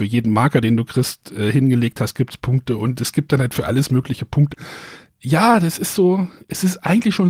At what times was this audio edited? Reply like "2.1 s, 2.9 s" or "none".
4.5 s